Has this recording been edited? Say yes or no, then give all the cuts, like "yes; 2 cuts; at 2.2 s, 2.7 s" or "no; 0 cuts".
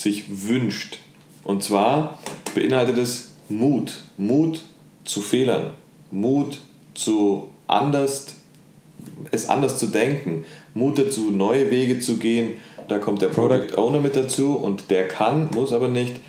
yes; 1 cut; at 12.9 s